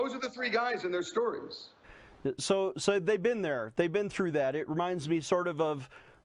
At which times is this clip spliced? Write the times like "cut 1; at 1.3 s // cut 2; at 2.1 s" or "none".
none